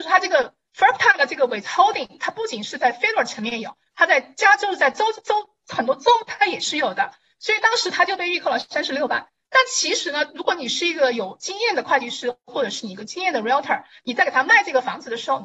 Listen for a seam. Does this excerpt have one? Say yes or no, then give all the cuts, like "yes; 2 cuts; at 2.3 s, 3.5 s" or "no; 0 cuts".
no; 0 cuts